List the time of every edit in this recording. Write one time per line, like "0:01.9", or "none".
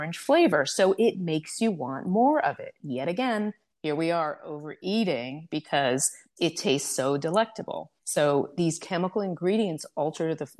0:08.0